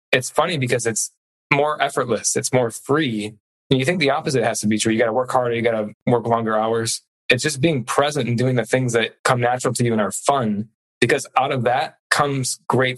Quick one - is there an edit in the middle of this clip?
no; 0 cuts

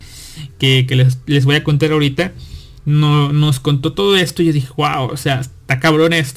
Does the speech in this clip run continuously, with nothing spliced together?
yes; 0 cuts

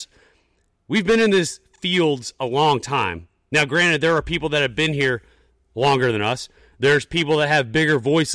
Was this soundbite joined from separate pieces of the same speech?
no; 0 cuts

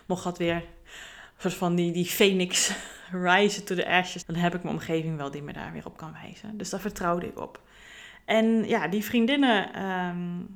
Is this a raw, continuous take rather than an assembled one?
no; 1 cut; at 4.2 s

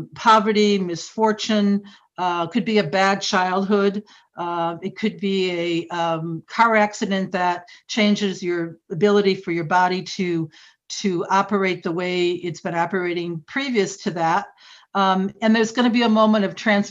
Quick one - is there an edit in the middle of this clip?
no; 0 cuts

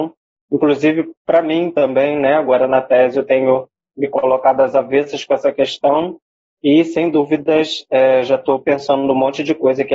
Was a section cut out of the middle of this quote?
no; 0 cuts

